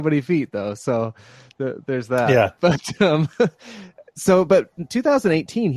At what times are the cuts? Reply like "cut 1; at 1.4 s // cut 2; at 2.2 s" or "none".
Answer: none